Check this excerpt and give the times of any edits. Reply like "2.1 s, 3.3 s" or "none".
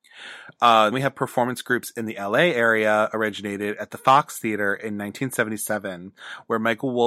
0.9 s